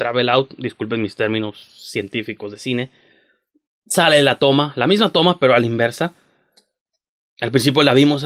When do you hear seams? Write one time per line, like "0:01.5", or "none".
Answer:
none